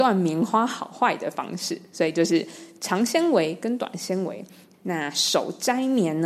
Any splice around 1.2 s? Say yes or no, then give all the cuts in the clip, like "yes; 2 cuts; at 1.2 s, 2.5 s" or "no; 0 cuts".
no; 1 cut; at 4.7 s